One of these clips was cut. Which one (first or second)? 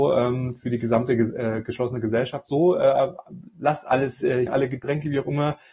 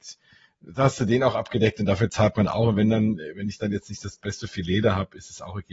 first